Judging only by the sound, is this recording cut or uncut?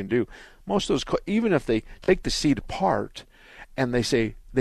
uncut